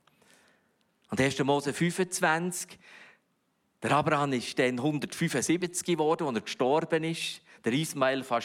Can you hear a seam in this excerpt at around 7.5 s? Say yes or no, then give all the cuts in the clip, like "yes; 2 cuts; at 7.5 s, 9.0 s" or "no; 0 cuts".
no; 0 cuts